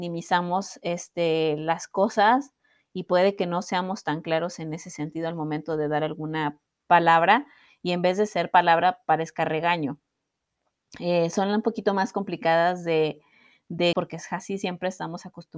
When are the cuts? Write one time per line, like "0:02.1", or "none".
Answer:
0:13.9